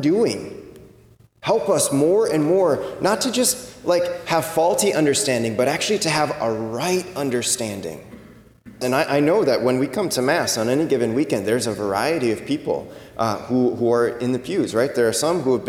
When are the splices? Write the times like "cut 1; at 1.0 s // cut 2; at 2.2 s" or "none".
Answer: cut 1; at 8.8 s